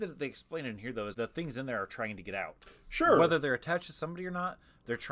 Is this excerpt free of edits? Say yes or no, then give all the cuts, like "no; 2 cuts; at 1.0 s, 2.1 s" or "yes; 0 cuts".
no; 1 cut; at 1.1 s